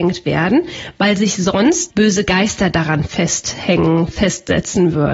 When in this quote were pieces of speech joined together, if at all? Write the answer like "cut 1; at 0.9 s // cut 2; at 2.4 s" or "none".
cut 1; at 1.9 s